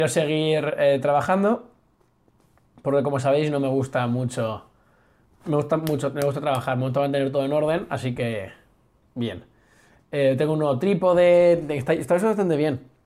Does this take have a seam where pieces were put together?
no; 0 cuts

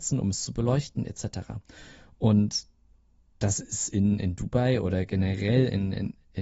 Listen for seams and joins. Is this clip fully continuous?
yes; 0 cuts

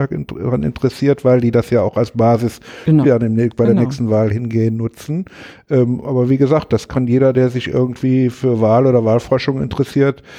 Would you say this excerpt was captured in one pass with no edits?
no; 1 cut; at 3.0 s

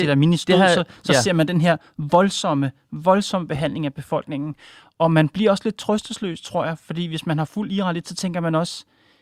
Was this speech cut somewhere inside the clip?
no; 0 cuts

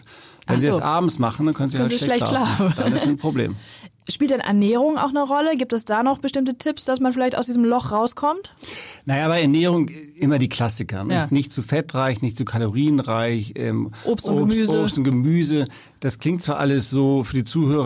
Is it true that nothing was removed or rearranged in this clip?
yes; 0 cuts

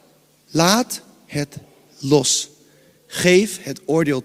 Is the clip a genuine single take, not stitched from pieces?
yes; 0 cuts

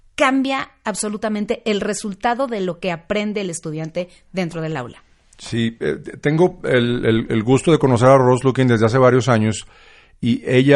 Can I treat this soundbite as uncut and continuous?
yes; 0 cuts

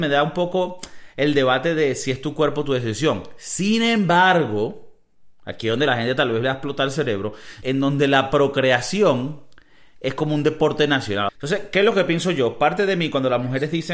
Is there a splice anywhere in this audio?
yes; 2 cuts; at 7.6 s, 11.3 s

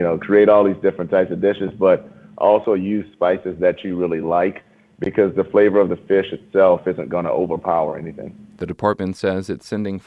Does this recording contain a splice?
no; 0 cuts

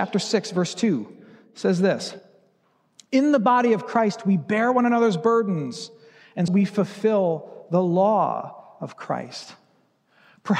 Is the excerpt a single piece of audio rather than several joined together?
no; 1 cut; at 6.5 s

